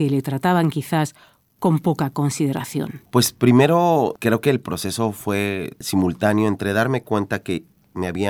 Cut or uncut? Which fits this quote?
uncut